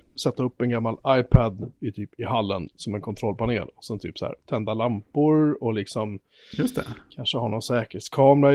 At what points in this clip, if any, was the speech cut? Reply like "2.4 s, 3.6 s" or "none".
1.7 s